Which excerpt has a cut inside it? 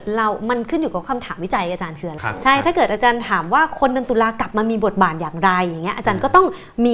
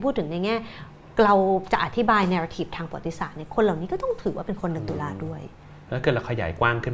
first; 1 cut; at 2.2 s

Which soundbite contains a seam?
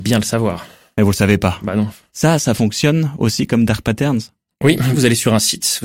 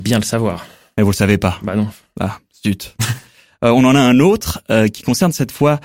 first; 2 cuts; at 2.1 s, 4.9 s

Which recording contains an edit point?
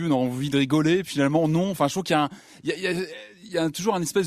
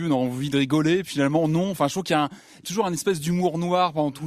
second; 1 cut; at 2.6 s

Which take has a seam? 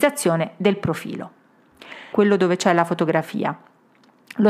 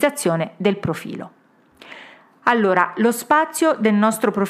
first; 1 cut; at 2.1 s

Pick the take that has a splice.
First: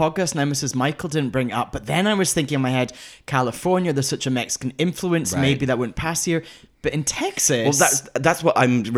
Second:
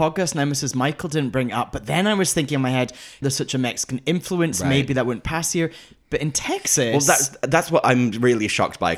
second; 1 cut; at 3.2 s

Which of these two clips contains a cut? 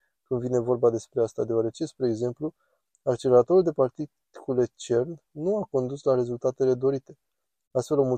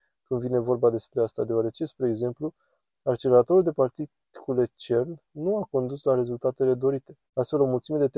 second; 1 cut; at 7.3 s

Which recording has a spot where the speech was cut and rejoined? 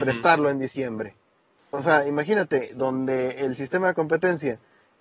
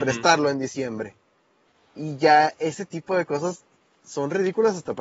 first; 1 cut; at 1.6 s

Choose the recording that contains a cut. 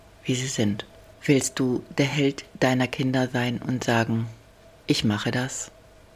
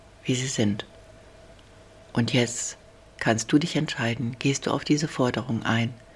first; 2 cuts; at 1.1 s, 4.7 s

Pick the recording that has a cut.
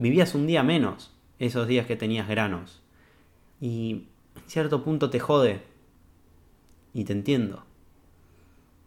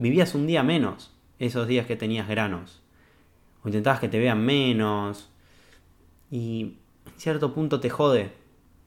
first; 1 cut; at 3.5 s

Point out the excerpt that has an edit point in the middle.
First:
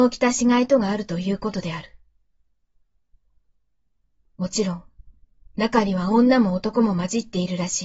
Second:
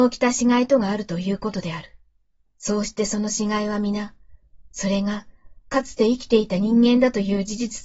second; 1 cut; at 2.5 s

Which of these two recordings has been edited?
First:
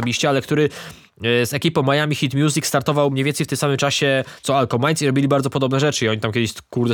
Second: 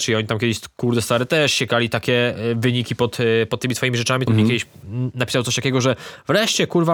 second; 1 cut; at 4.3 s

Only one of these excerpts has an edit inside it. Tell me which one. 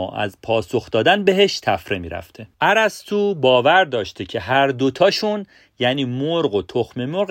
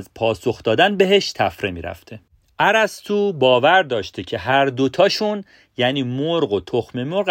first; 1 cut; at 2.5 s

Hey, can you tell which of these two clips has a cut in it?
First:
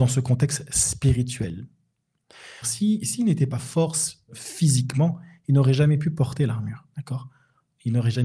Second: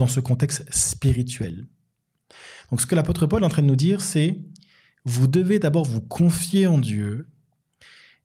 first; 2 cuts; at 2.6 s, 4.3 s

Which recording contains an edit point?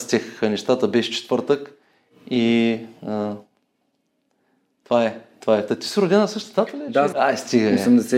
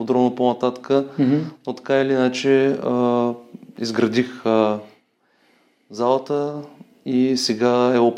first; 1 cut; at 7.1 s

